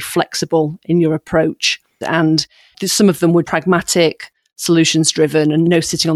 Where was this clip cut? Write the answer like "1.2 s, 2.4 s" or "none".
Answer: 2.0 s, 3.4 s